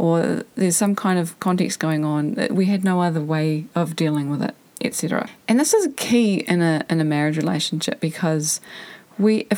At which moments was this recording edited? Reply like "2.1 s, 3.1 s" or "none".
none